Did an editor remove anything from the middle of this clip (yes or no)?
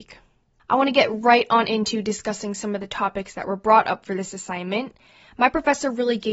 no